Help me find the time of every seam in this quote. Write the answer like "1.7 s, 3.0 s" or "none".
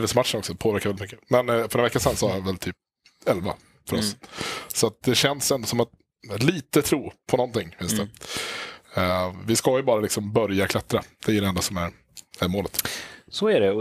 none